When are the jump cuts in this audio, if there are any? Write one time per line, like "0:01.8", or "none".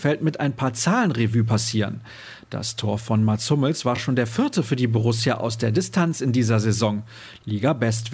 none